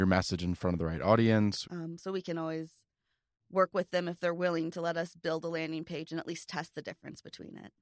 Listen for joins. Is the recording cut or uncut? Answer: cut